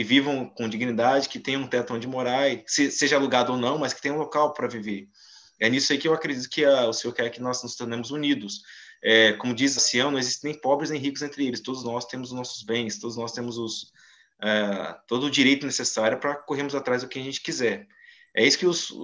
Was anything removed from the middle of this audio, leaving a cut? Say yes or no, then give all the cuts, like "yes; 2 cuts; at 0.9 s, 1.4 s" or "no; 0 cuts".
yes; 1 cut; at 9.8 s